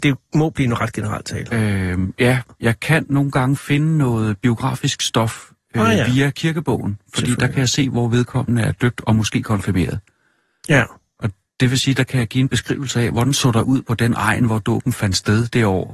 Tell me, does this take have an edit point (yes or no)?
no